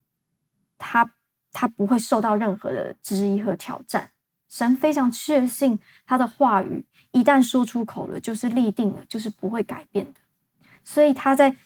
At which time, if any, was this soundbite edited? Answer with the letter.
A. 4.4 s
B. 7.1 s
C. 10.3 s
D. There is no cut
D